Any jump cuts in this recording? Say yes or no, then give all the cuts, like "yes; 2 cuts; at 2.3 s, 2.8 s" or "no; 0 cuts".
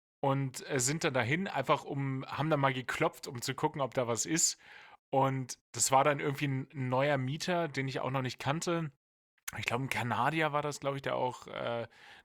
no; 0 cuts